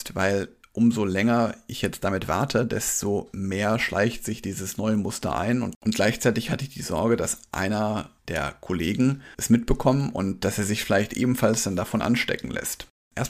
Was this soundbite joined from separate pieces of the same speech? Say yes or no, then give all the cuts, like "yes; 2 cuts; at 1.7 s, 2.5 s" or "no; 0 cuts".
yes; 2 cuts; at 8.2 s, 9.3 s